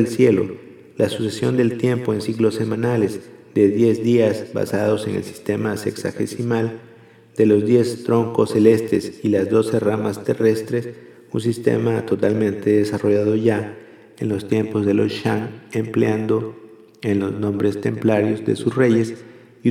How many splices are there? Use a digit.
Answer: 0